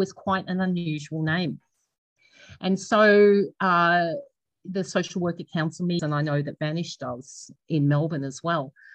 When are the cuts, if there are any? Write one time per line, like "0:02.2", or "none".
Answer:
0:06.0
0:07.6